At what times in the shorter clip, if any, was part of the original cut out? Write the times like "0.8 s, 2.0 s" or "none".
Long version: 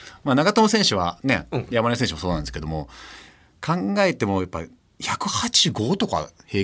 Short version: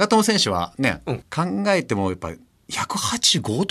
1.2 s